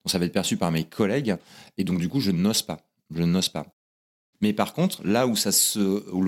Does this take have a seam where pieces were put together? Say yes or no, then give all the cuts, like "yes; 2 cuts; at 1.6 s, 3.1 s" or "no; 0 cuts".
yes; 1 cut; at 4.3 s